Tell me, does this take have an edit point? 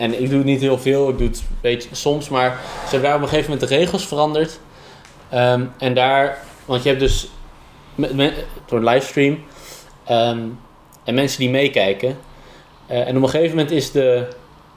yes; 1 cut; at 8.6 s

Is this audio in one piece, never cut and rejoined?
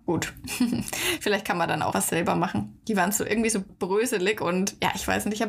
no; 2 cuts; at 1.9 s, 3.7 s

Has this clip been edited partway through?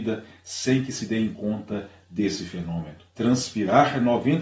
yes; 1 cut; at 3.1 s

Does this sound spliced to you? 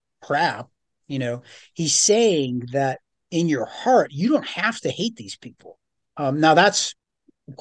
yes; 1 cut; at 6.1 s

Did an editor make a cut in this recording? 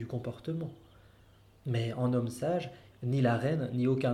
yes; 1 cut; at 2.9 s

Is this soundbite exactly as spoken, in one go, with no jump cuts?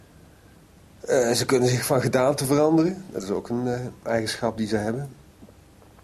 yes; 0 cuts

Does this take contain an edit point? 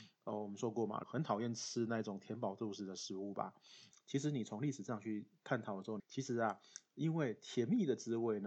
yes; 3 cuts; at 1.0 s, 3.9 s, 6.0 s

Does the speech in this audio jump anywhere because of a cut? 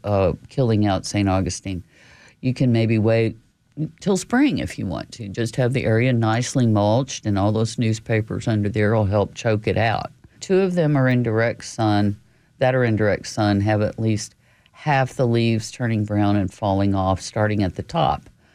yes; 1 cut; at 10.4 s

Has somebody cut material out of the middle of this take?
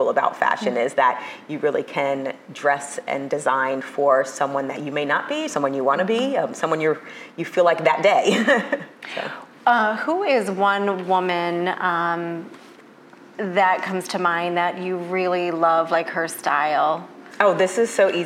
no; 0 cuts

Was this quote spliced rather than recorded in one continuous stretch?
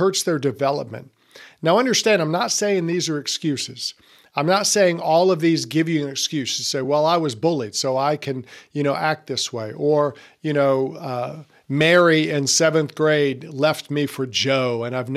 no; 0 cuts

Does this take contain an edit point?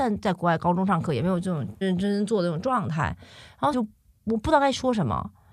yes; 2 cuts; at 1.8 s, 3.7 s

